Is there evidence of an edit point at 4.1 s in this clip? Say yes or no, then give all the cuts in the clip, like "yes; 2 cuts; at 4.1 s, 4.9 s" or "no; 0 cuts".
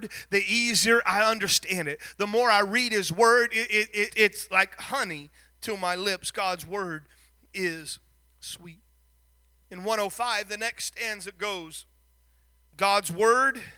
yes; 1 cut; at 4.1 s